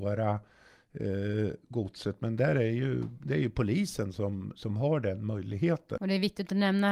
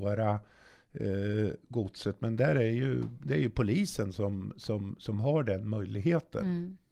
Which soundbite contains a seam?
first; 2 cuts; at 4.5 s, 6.0 s

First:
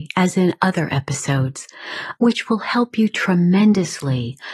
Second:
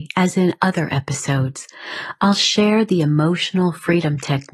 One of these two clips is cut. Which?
first; 1 cut; at 2.2 s

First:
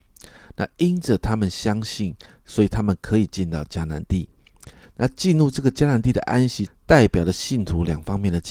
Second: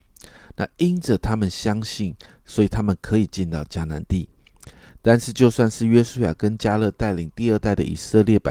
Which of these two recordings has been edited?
first; 2 cuts; at 4.9 s, 6.7 s

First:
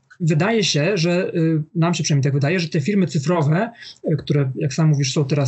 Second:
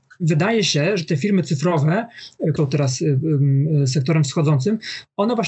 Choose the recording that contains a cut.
second; 2 cuts; at 1.0 s, 2.6 s

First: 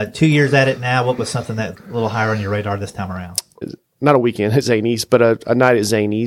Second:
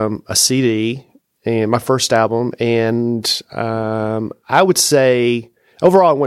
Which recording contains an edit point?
first; 2 cuts; at 1.7 s, 3.6 s

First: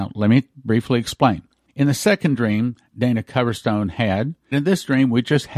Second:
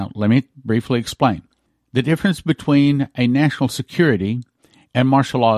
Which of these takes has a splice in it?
first; 2 cuts; at 1.7 s, 4.5 s

